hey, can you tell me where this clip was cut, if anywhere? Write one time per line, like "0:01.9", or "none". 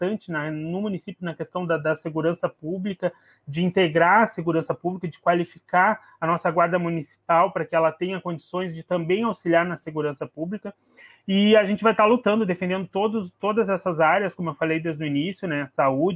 none